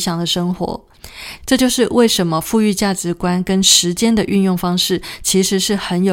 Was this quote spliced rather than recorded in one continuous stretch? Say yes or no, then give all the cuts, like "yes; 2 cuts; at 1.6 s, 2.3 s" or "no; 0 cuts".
yes; 1 cut; at 1.4 s